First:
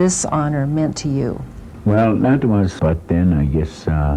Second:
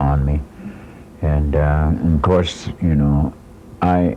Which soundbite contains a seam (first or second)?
first